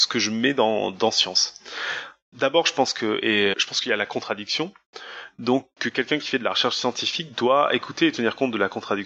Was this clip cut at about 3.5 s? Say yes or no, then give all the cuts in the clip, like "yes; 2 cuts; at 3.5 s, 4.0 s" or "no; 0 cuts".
yes; 1 cut; at 3.5 s